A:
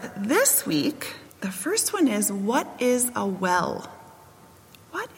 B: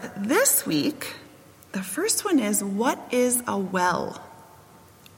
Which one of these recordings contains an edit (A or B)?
A